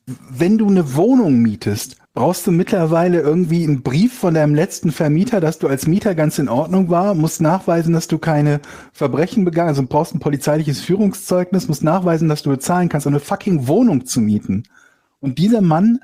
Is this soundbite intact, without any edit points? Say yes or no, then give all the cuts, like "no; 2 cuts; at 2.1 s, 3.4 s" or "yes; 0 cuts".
no; 1 cut; at 2.0 s